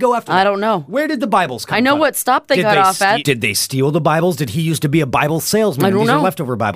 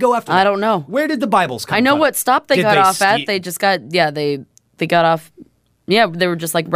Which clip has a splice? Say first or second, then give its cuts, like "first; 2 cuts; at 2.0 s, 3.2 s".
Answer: first; 1 cut; at 3.2 s